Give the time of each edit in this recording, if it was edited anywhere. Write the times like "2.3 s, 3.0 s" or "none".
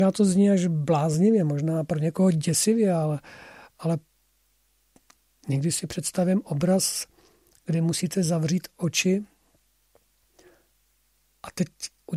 none